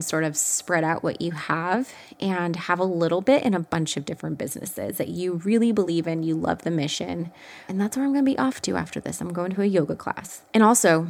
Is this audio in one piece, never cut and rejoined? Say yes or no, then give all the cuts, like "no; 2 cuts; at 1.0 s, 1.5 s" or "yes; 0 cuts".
yes; 0 cuts